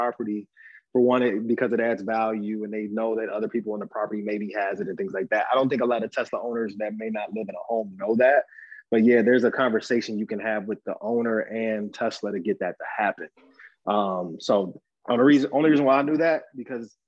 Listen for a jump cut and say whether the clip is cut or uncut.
uncut